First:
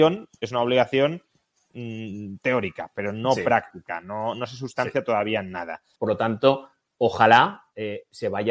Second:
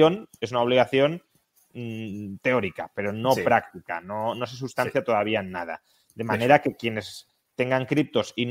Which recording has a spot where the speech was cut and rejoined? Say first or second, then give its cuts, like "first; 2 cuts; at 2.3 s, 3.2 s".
first; 1 cut; at 6.0 s